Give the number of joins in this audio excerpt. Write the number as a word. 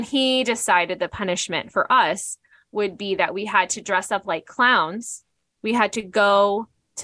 zero